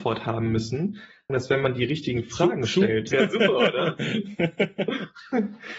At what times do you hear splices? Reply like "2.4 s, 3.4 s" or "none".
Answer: 1.3 s, 3.1 s